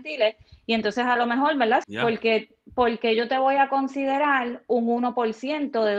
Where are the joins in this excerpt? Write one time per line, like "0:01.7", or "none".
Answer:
0:01.8